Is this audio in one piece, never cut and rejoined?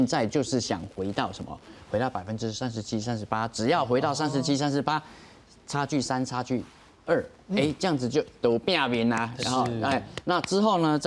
yes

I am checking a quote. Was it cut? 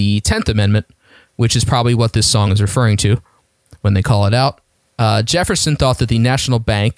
no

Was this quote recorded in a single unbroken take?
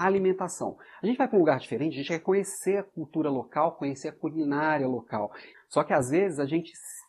no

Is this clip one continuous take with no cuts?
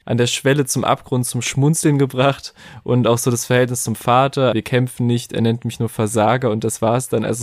no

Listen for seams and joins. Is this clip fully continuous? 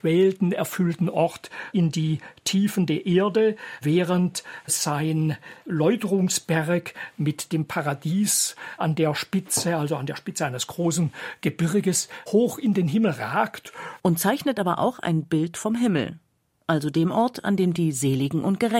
no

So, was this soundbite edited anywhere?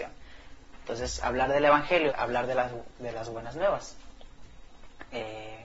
yes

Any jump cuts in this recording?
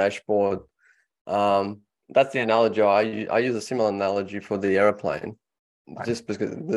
no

